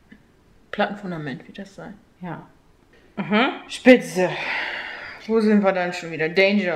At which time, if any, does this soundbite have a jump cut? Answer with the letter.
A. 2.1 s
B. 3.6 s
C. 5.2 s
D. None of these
D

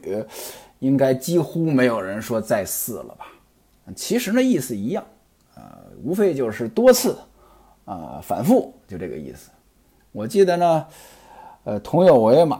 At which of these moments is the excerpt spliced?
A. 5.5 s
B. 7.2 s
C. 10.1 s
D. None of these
D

